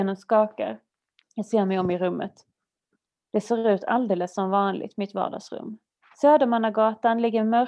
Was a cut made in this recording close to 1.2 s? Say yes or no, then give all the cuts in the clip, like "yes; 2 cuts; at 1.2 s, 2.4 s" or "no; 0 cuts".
yes; 2 cuts; at 1.2 s, 6.0 s